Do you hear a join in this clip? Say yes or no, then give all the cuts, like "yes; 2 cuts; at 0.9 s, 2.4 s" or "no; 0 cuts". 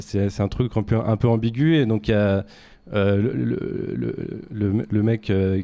no; 0 cuts